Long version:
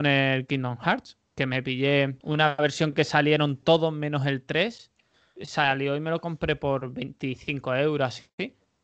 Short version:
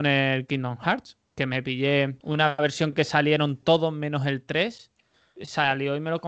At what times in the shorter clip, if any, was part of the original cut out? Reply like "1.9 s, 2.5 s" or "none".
none